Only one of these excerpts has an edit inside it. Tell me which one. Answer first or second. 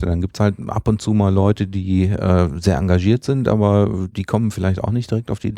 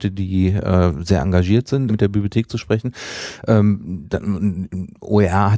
second